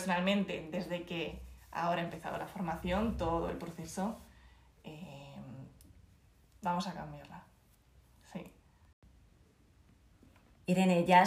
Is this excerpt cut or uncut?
uncut